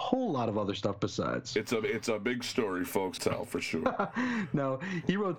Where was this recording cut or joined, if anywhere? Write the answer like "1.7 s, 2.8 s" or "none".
3.2 s